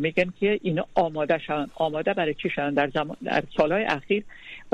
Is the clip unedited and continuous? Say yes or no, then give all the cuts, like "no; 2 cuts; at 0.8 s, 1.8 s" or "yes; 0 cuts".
yes; 0 cuts